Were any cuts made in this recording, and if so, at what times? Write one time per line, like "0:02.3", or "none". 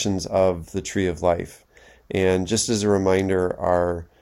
none